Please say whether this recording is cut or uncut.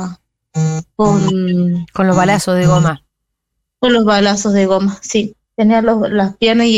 uncut